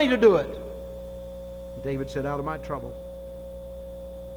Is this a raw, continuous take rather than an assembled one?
yes; 0 cuts

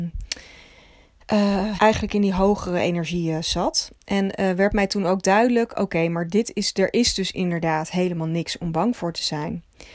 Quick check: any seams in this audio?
yes; 1 cut; at 1.8 s

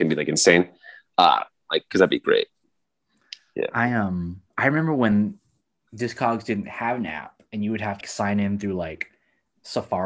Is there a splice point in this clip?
yes; 3 cuts; at 1.7 s, 4.5 s, 8.0 s

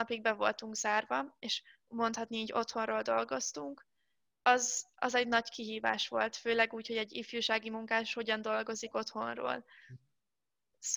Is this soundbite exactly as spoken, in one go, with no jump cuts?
yes; 0 cuts

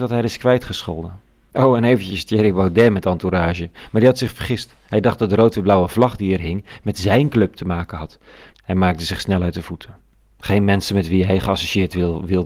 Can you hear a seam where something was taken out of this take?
yes; 2 cuts; at 1.5 s, 8.5 s

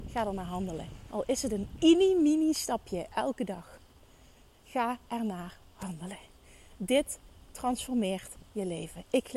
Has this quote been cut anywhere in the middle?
no; 0 cuts

